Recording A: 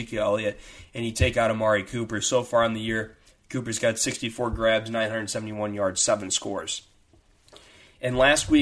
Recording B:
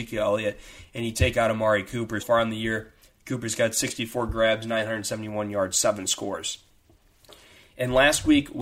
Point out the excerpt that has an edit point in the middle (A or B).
B